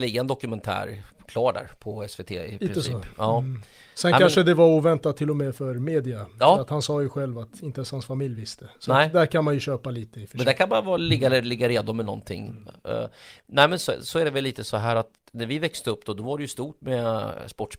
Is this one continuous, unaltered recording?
yes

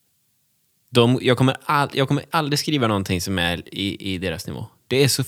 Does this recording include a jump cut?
no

